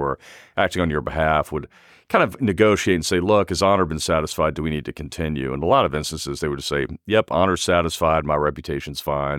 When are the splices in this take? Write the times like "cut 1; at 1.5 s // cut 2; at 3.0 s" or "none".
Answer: none

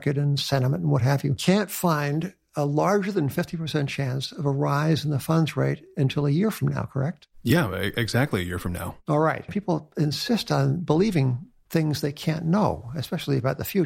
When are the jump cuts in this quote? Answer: cut 1; at 9.5 s

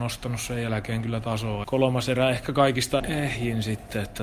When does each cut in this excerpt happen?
cut 1; at 1.6 s // cut 2; at 3.0 s

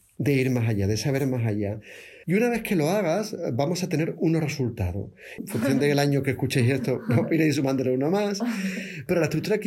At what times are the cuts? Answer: cut 1; at 2.2 s // cut 2; at 5.4 s

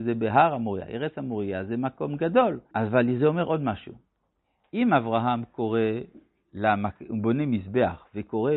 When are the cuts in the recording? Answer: cut 1; at 2.7 s

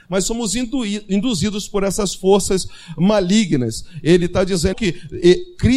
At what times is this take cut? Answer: cut 1; at 4.7 s

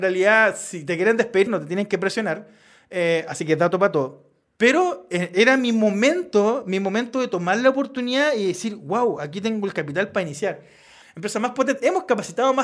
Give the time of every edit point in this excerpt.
cut 1; at 1.5 s // cut 2; at 11.0 s

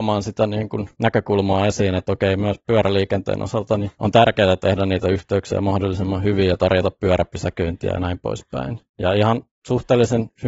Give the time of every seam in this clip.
none

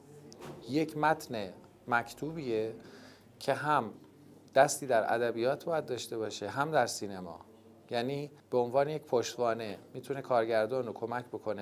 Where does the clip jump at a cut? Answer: cut 1; at 8.4 s

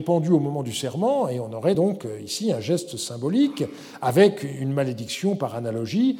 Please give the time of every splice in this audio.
none

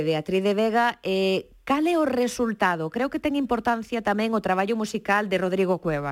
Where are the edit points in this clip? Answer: none

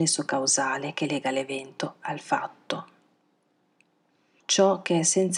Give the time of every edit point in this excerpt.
cut 1; at 4.4 s

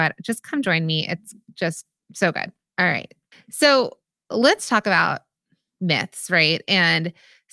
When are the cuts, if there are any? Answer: none

